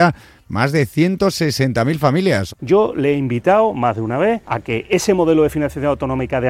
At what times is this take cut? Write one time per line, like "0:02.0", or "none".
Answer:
0:02.5